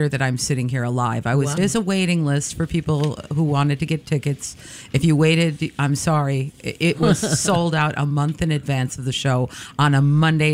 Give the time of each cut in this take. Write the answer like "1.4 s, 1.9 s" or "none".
1.6 s